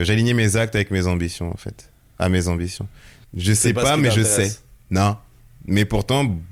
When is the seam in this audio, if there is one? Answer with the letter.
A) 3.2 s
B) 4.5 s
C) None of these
A